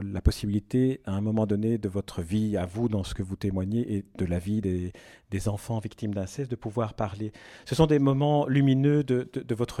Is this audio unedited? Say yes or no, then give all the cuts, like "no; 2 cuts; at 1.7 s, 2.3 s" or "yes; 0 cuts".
yes; 0 cuts